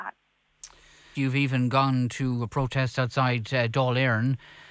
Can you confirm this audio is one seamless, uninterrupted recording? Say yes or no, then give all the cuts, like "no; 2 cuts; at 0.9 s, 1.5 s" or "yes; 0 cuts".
no; 1 cut; at 1.1 s